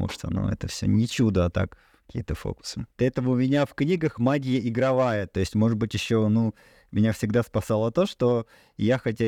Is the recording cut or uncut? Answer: uncut